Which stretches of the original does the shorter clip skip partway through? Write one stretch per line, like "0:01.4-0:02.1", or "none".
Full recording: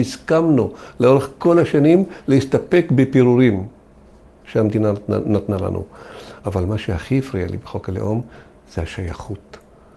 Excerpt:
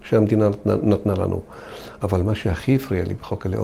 none